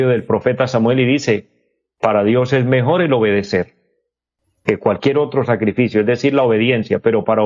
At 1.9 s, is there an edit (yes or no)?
no